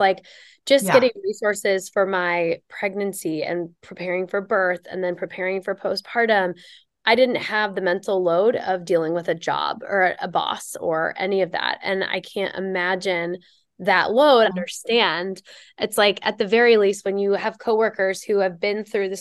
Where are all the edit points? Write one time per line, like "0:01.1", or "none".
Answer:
0:14.4